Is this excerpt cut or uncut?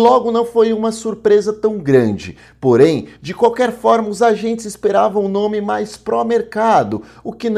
uncut